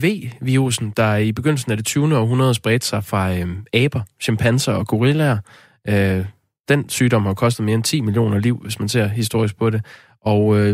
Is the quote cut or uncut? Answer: uncut